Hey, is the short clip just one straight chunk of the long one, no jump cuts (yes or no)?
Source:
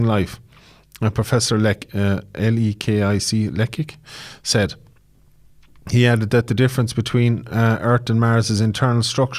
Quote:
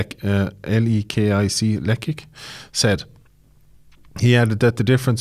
yes